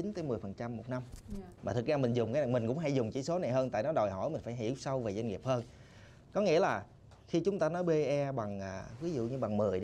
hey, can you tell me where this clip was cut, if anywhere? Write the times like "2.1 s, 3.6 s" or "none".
1.6 s